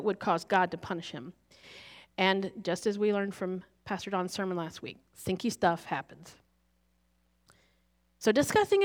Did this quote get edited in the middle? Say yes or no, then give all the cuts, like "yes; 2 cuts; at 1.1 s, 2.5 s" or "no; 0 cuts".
no; 0 cuts